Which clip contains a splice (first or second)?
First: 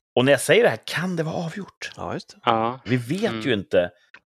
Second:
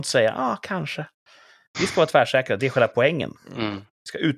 first